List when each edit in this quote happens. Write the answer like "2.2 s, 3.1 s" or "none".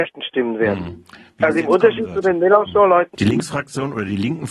3.1 s